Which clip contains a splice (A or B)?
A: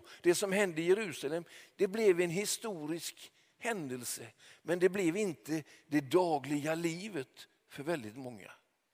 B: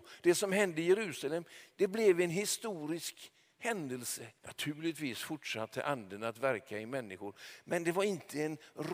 B